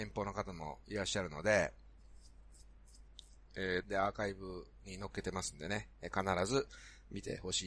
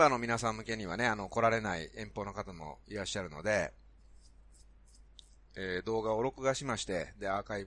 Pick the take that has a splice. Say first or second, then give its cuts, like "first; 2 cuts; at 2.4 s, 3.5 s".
first; 1 cut; at 3.8 s